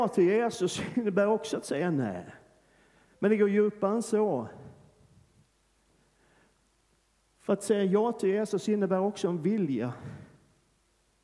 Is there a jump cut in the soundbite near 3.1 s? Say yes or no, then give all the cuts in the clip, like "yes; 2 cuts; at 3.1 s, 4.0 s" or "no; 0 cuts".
yes; 1 cut; at 3.1 s